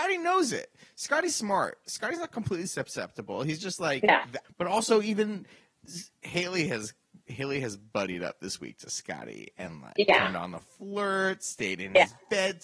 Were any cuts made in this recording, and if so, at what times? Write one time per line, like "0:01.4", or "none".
0:04.4